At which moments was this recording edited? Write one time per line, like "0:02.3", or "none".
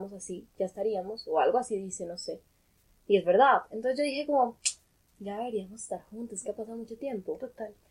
0:05.1

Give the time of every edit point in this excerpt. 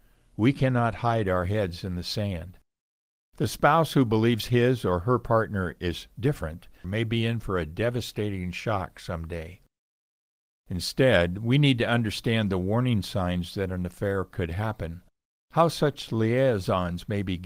0:06.8

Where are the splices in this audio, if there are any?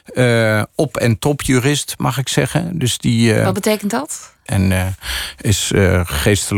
0:04.5

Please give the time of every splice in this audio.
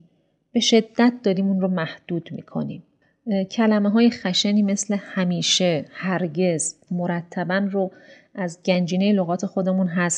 0:06.9

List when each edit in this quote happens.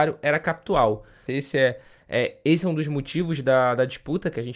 0:01.3

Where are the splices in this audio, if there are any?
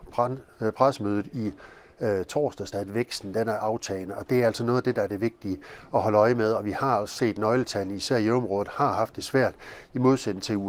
0:02.7

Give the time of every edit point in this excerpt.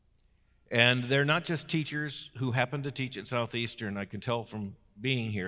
none

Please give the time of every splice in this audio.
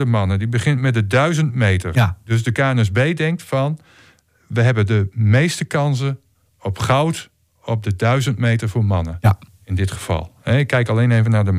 none

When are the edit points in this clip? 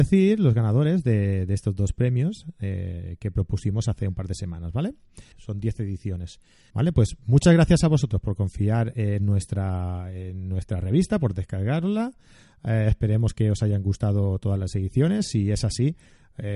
0:05.3
0:06.7

